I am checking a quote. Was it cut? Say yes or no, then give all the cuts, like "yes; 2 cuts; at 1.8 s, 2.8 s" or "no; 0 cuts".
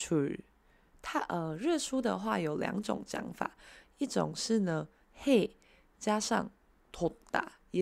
no; 0 cuts